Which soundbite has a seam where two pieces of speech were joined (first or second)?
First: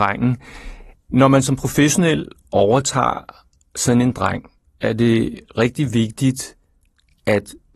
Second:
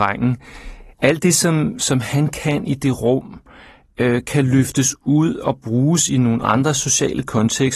first